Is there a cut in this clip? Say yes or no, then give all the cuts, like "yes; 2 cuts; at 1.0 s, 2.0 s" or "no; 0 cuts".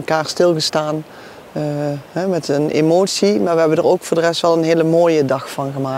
no; 0 cuts